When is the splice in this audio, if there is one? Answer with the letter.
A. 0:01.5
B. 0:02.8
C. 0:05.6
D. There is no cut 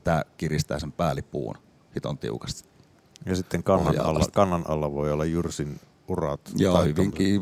D